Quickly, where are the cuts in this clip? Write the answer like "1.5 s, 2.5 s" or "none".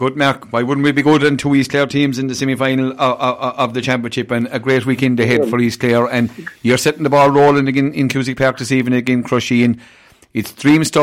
none